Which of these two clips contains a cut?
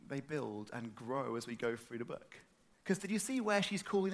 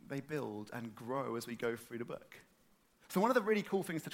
first; 1 cut; at 2.7 s

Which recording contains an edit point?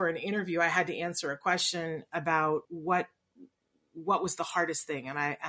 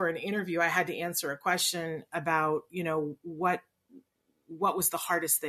first; 1 cut; at 2.6 s

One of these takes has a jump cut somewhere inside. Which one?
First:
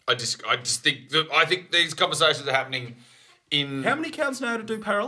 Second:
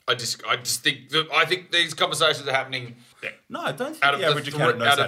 second; 1 cut; at 3.1 s

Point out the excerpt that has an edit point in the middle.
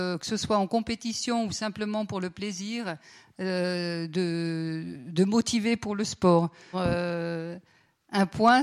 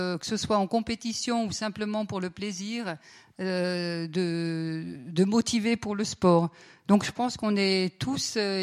first; 1 cut; at 6.7 s

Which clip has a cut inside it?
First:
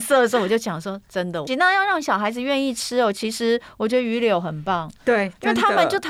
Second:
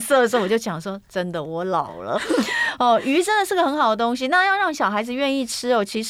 first; 1 cut; at 1.5 s

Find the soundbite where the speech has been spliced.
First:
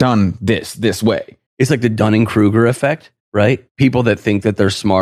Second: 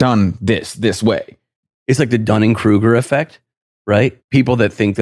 first; 2 cuts; at 1.5 s, 3.2 s

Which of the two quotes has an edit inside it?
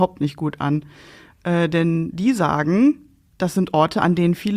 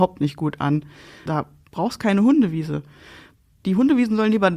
second; 1 cut; at 1.3 s

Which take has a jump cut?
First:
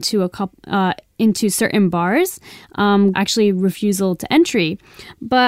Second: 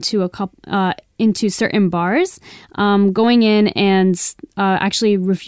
first; 1 cut; at 3.1 s

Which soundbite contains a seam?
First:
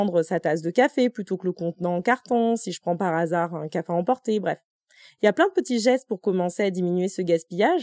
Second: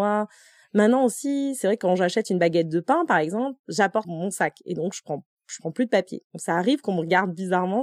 second; 1 cut; at 4.0 s

